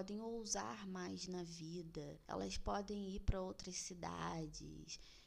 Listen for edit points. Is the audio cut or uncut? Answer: uncut